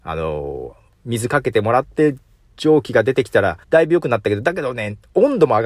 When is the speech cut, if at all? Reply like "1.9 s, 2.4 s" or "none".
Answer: 3.6 s